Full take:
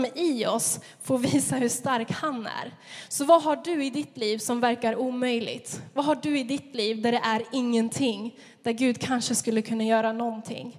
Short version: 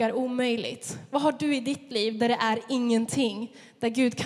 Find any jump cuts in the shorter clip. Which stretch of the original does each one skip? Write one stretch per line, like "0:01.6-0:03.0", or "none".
none